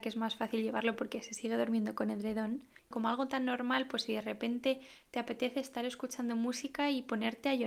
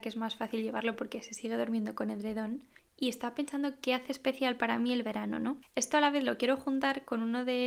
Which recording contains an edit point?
first; 1 cut; at 2.9 s

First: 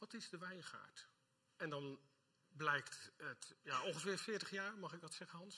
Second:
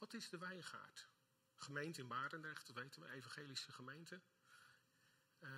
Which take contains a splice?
first; 2 cuts; at 1.5 s, 3.6 s

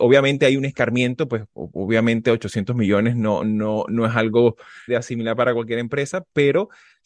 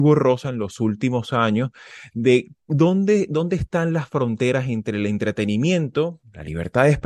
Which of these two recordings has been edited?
first; 1 cut; at 4.9 s

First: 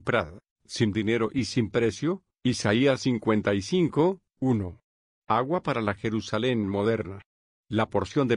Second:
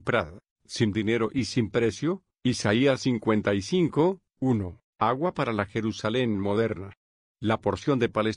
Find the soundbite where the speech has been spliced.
second; 1 cut; at 4.9 s

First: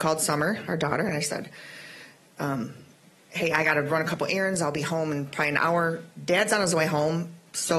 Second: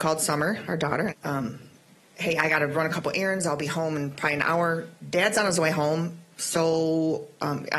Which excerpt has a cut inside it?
second; 1 cut; at 1.1 s

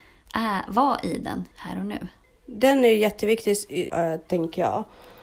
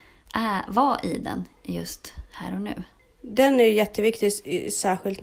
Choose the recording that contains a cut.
first; 2 cuts; at 1.5 s, 3.9 s

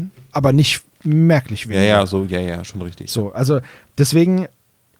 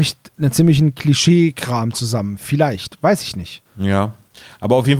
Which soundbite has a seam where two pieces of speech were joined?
second; 1 cut; at 3.7 s

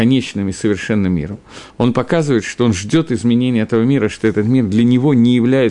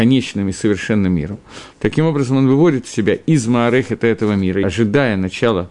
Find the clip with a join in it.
second; 2 cuts; at 1.7 s, 4.6 s

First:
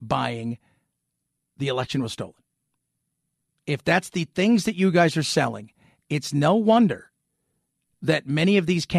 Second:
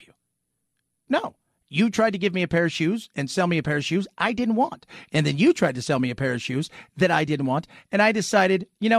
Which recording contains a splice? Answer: second; 1 cut; at 1.1 s

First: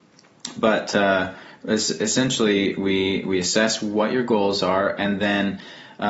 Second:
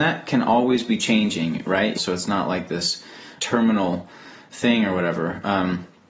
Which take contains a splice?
second; 2 cuts; at 2.0 s, 3.4 s

